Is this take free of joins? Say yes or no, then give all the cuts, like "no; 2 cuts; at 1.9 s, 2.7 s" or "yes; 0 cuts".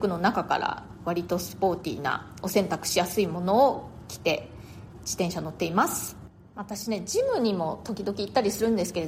yes; 0 cuts